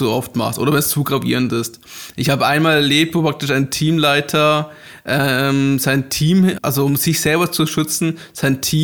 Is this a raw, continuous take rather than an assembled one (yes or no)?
no